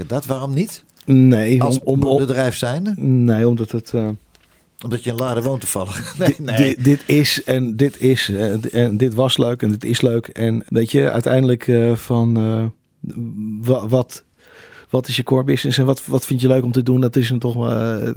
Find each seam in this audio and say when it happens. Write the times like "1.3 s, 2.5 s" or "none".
10.7 s